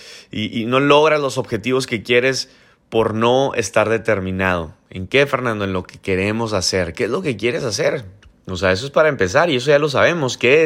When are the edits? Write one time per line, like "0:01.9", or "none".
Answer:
none

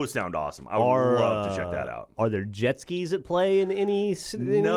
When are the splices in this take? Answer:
none

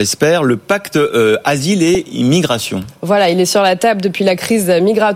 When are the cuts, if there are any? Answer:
none

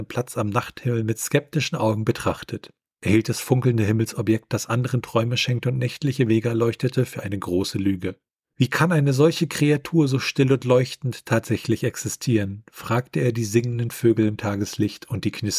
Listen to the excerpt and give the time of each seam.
none

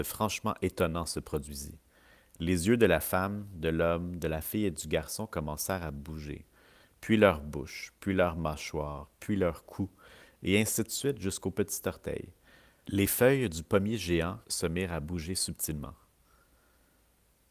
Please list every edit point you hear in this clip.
0:14.4

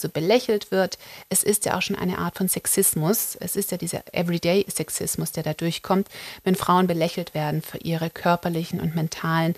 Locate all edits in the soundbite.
none

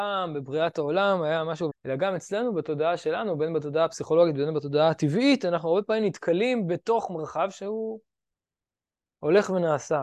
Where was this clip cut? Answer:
0:01.7

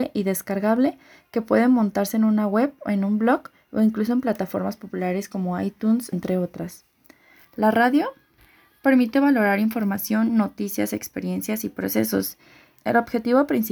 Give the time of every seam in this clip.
0:06.1
0:12.8

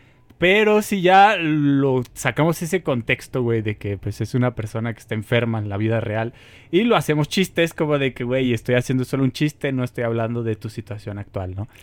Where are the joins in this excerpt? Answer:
none

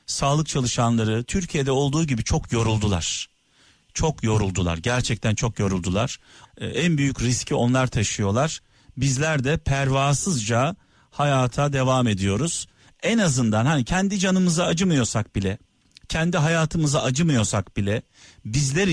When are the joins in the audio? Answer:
0:06.4

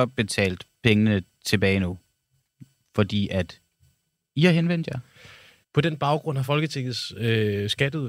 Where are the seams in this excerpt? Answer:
0:05.6

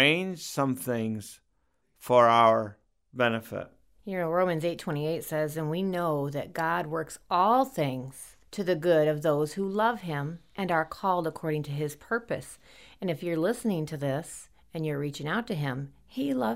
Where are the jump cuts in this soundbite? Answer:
0:04.0
0:08.4

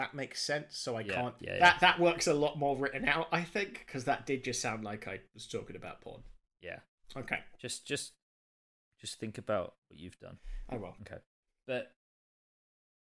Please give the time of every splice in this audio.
0:01.4
0:07.0

